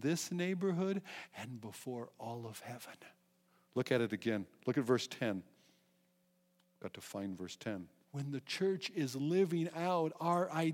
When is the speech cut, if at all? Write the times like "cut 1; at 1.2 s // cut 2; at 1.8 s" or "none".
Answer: cut 1; at 8.0 s